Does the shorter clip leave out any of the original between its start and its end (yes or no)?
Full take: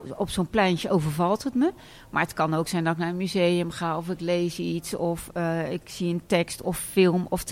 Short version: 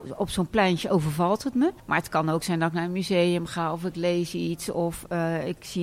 yes